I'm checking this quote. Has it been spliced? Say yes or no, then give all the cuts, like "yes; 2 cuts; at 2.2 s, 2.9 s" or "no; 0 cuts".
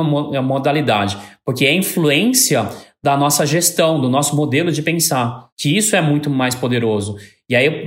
yes; 1 cut; at 5.5 s